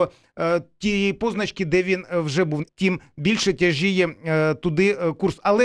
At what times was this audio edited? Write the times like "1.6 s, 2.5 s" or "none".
2.7 s